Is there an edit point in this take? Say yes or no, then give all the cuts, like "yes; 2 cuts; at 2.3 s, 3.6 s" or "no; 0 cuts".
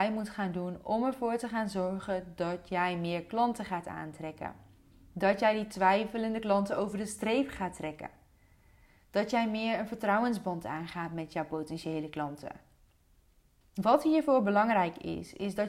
yes; 1 cut; at 13.6 s